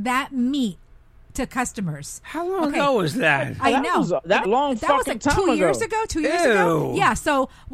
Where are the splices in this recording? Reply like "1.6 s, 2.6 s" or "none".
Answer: 4.4 s